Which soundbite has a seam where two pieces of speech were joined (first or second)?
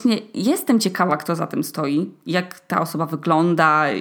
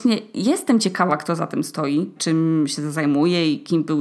second